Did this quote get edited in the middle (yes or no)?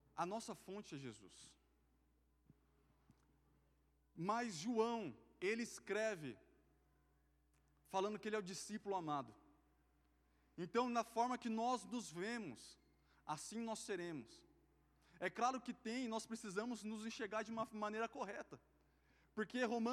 no